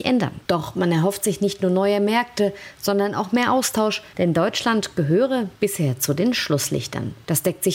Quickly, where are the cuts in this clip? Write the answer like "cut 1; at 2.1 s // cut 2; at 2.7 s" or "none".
cut 1; at 4.1 s // cut 2; at 5.6 s